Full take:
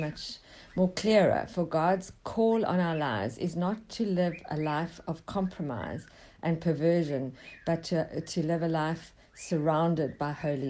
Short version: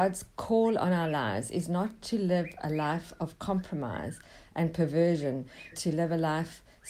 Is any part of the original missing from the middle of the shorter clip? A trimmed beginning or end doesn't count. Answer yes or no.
yes